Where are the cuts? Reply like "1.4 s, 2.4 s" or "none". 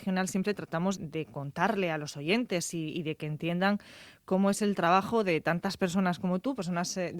1.0 s